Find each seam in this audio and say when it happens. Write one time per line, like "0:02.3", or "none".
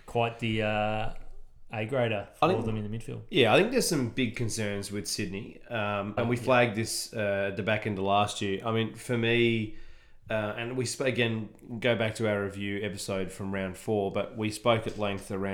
0:06.2